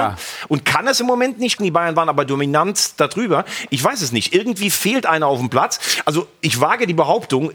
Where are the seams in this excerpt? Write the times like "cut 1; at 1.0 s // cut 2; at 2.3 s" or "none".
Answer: cut 1; at 1.6 s